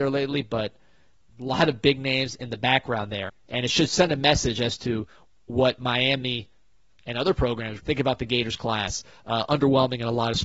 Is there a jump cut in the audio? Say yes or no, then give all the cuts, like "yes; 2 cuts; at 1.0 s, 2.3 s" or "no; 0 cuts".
yes; 2 cuts; at 3.3 s, 7.8 s